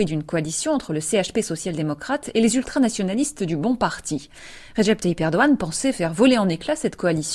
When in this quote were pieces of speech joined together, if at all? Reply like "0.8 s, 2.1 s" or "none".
none